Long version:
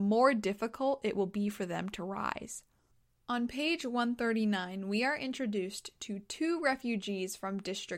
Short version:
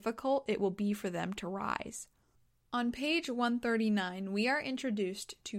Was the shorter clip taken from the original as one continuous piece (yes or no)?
yes